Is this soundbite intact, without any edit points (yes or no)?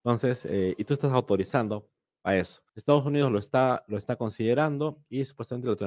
no